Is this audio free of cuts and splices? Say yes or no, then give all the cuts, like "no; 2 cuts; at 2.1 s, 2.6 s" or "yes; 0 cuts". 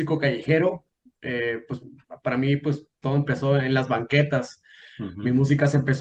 yes; 0 cuts